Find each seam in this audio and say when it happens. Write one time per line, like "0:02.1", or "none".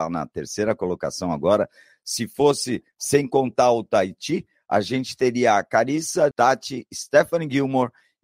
0:06.3